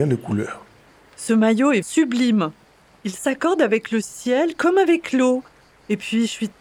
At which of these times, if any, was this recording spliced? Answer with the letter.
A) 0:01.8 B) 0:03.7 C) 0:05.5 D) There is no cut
A